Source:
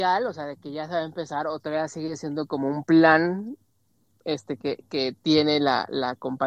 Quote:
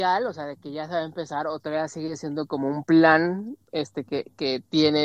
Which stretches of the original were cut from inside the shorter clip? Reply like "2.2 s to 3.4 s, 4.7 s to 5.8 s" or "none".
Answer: 3.6 s to 4.2 s